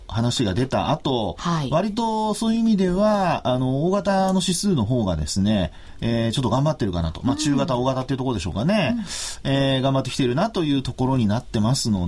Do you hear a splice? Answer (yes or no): no